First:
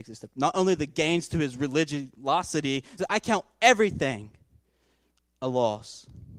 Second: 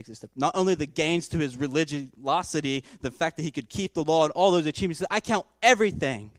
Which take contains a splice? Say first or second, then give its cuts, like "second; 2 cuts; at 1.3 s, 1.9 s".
first; 1 cut; at 3.0 s